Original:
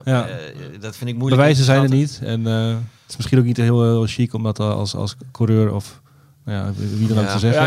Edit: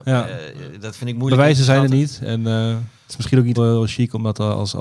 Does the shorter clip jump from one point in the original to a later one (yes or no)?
yes